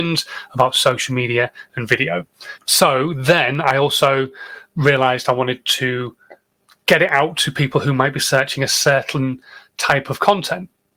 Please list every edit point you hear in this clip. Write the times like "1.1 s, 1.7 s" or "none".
2.6 s